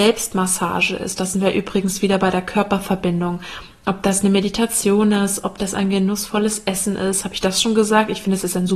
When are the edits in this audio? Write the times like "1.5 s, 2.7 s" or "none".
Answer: none